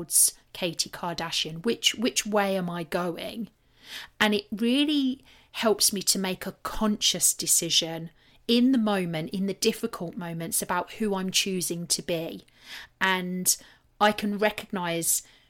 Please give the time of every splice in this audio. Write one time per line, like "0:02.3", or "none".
none